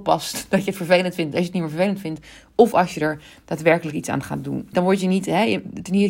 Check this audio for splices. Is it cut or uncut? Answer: cut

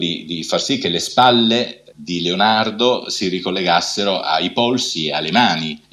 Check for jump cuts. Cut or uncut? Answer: uncut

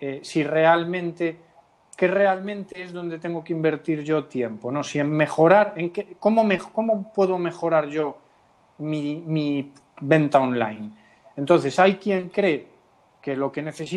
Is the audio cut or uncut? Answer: uncut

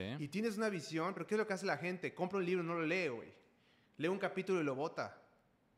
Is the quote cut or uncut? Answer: uncut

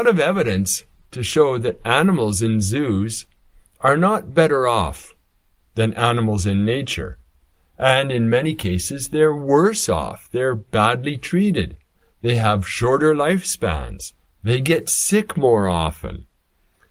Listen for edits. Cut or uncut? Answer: uncut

